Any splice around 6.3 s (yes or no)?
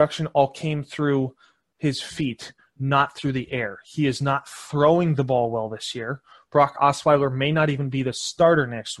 no